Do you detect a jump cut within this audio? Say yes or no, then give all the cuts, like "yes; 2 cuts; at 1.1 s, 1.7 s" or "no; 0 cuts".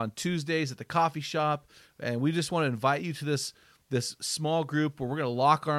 no; 0 cuts